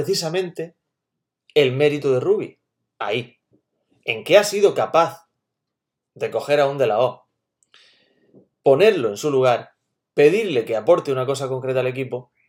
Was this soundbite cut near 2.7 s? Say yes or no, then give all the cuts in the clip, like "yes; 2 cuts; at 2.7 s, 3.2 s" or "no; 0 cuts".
no; 0 cuts